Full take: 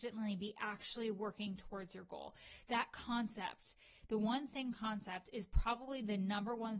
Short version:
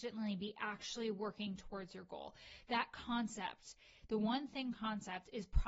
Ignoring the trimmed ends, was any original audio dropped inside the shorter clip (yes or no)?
no